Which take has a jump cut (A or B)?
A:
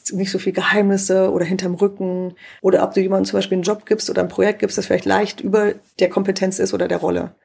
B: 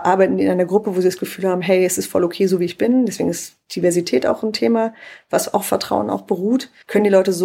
A